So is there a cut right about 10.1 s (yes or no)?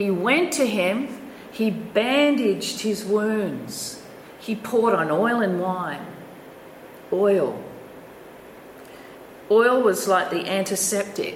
no